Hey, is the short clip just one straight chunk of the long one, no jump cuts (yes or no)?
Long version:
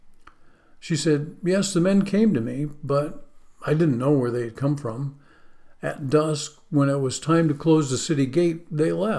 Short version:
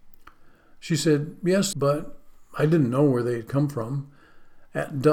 no